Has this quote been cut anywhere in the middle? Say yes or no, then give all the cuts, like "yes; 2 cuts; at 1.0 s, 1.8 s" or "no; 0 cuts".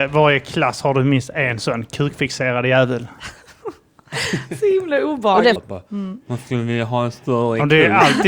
yes; 1 cut; at 5.6 s